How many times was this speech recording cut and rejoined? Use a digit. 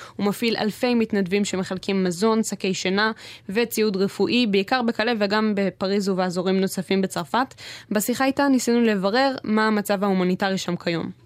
0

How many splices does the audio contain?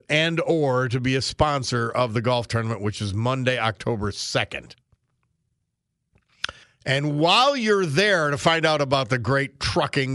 1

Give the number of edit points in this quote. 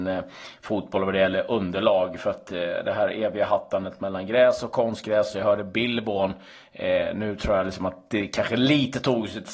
0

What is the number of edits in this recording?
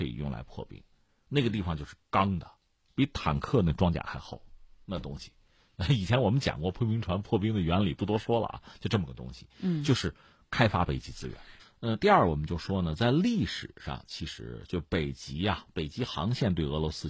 1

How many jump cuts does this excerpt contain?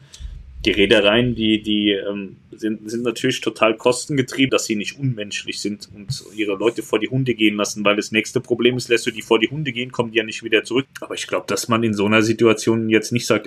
2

